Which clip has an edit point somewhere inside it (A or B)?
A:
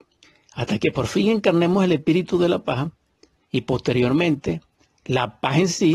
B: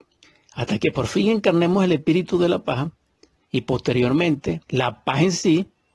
B